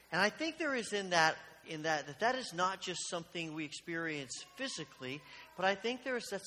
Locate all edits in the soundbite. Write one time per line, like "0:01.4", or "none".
none

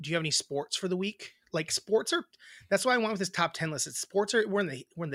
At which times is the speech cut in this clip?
none

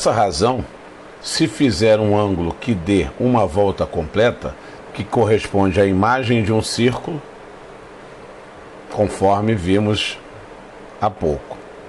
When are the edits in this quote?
0:04.9

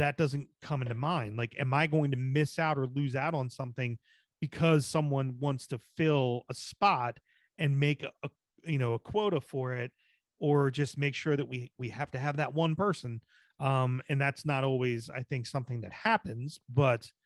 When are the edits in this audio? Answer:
0:13.4

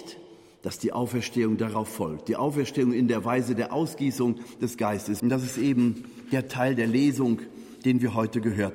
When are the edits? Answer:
0:05.2

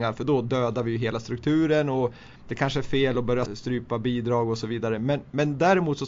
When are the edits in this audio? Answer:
0:02.4
0:03.5

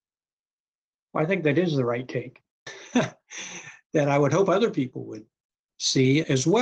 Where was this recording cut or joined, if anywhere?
0:02.7

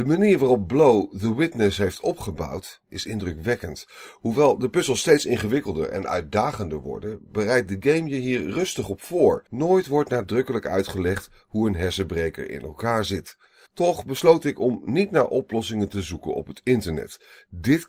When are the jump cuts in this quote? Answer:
0:09.5
0:13.7

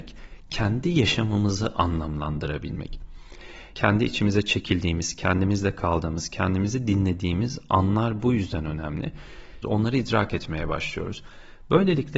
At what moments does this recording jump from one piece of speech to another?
0:03.7
0:09.6

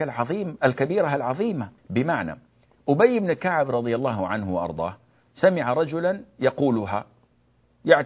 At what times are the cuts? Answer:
0:01.8

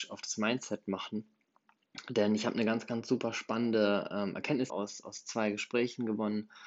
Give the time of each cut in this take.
0:04.7

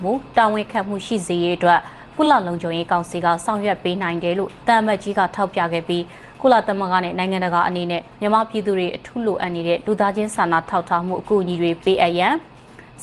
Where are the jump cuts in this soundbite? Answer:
none

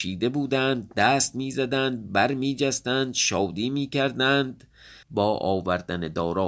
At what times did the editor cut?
0:05.0

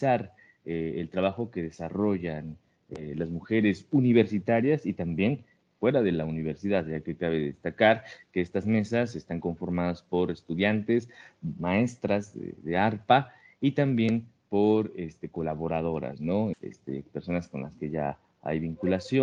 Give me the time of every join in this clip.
0:16.5

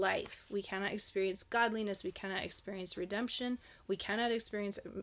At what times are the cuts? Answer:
none

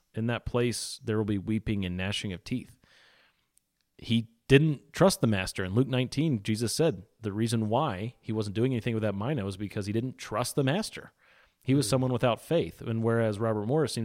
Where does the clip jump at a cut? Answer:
none

